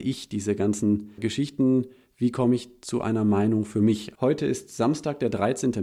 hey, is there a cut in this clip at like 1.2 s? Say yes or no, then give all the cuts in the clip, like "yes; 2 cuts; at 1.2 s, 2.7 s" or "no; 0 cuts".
yes; 2 cuts; at 1.2 s, 4.1 s